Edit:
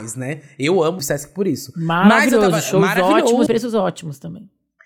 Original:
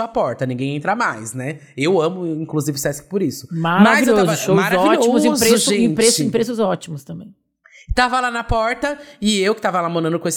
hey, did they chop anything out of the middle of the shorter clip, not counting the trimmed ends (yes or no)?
yes